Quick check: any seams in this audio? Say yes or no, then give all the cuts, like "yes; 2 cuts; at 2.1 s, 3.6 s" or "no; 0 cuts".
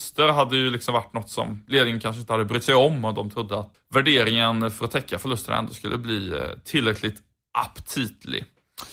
yes; 1 cut; at 3.7 s